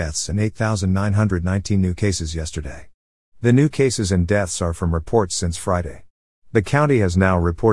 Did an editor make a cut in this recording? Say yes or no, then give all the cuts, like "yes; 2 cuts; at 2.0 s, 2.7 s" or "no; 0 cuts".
no; 0 cuts